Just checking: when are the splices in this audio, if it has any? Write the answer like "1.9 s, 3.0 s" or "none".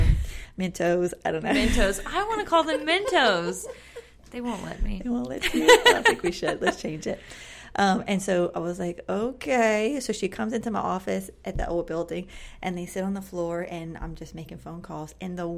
none